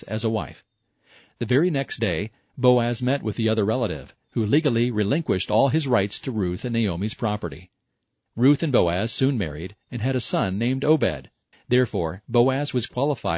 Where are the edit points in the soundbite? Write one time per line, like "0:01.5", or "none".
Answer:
0:11.5